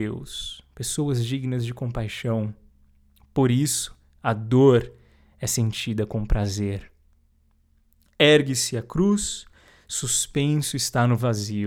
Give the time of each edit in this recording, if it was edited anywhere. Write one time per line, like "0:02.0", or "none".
none

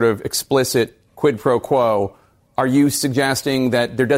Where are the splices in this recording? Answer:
0:01.1

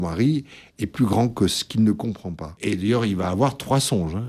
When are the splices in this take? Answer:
0:02.6

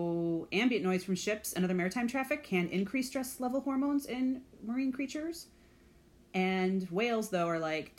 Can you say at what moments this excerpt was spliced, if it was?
none

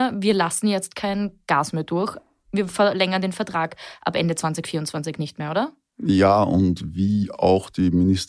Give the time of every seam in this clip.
none

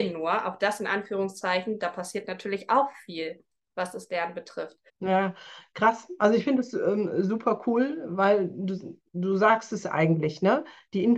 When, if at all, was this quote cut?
0:04.9

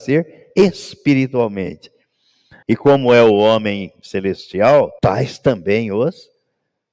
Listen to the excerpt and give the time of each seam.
0:02.6
0:05.0

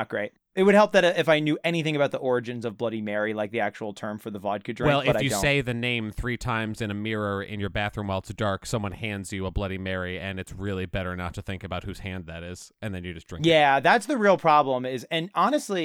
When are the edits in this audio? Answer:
none

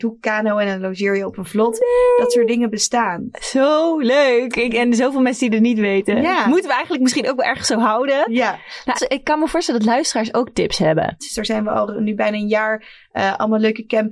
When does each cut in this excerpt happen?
0:08.9
0:11.2

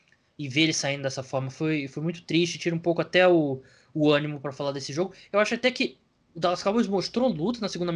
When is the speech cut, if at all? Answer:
none

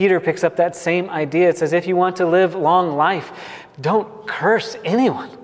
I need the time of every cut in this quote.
none

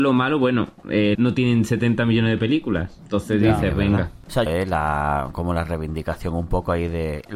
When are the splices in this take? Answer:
0:01.1
0:04.5

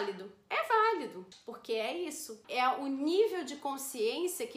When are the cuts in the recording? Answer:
0:01.3
0:02.4

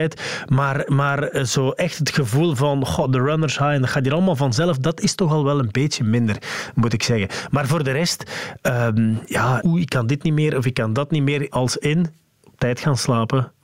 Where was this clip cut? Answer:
0:09.6
0:11.5

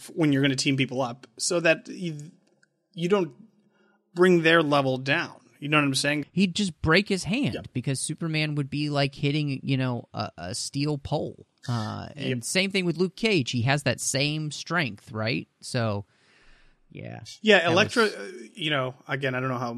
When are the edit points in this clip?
0:06.2

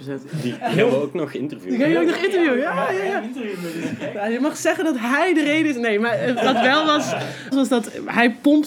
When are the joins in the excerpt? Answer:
0:06.4
0:07.5

